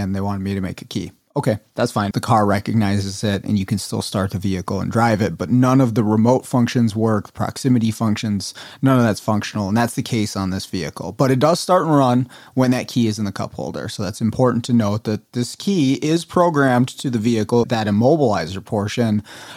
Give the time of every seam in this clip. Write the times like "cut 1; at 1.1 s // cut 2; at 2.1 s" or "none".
cut 1; at 2.1 s // cut 2; at 17.6 s